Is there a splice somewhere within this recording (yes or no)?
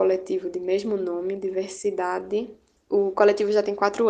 no